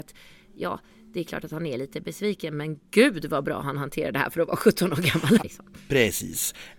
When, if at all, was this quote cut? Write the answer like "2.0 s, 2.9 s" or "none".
5.4 s